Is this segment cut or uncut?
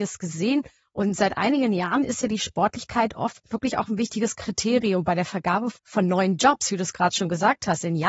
cut